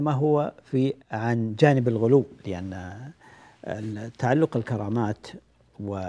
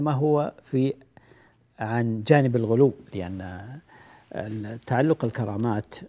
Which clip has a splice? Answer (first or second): first